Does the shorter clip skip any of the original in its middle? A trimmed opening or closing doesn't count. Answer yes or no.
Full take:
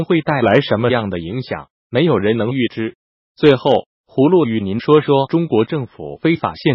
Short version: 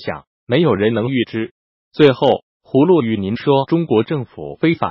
yes